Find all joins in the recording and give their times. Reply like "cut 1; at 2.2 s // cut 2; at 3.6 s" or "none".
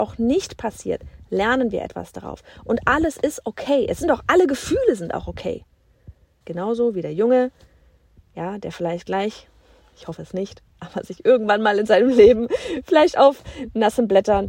cut 1; at 4.3 s // cut 2; at 6.4 s